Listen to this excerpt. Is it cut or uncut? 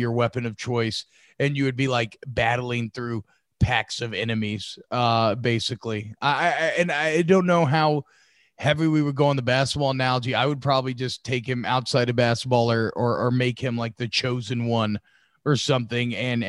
uncut